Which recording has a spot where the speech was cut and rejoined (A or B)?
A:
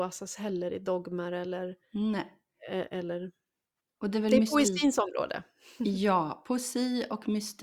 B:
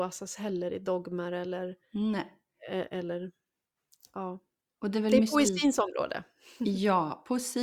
A